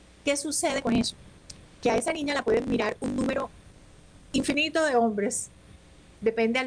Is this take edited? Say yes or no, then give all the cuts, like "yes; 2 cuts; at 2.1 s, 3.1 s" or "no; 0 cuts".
no; 0 cuts